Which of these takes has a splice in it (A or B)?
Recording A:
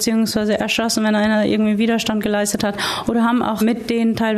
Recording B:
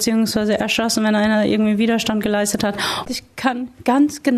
B